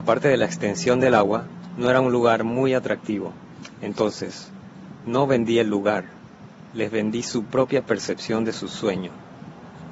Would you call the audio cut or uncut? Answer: uncut